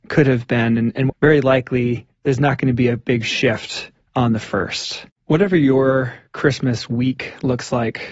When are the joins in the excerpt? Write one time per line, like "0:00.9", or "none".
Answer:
0:01.1
0:05.1